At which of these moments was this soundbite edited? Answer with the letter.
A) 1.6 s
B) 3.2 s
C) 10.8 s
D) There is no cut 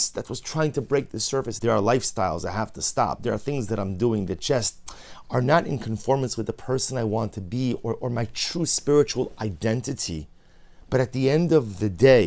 A